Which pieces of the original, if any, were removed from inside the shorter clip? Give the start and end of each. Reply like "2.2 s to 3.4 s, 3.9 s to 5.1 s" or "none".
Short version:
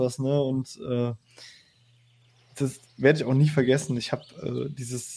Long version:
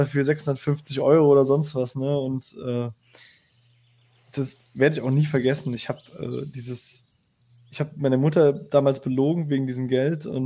none